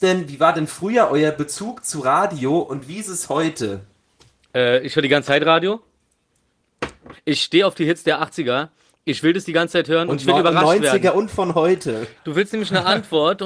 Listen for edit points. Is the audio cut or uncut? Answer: cut